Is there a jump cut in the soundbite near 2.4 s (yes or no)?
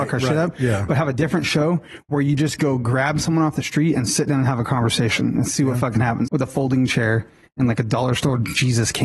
no